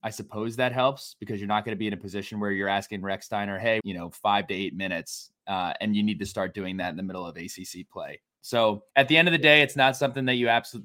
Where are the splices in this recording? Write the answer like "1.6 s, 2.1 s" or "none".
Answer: 3.8 s, 8.9 s